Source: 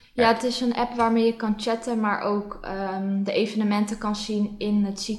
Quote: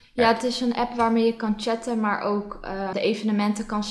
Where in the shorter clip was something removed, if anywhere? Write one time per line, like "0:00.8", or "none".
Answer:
0:02.9